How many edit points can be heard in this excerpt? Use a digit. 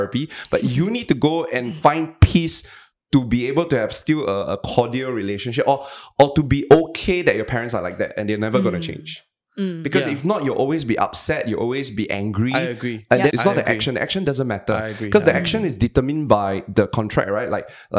1